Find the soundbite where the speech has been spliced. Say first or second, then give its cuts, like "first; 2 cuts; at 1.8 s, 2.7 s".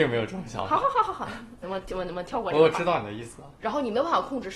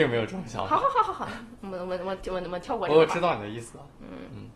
first; 2 cuts; at 1.6 s, 3.6 s